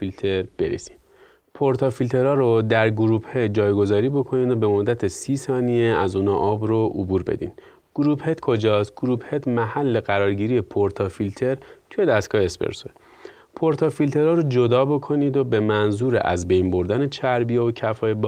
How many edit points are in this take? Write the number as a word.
zero